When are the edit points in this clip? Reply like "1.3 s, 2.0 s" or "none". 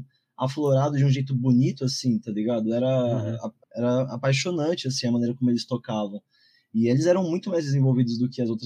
3.6 s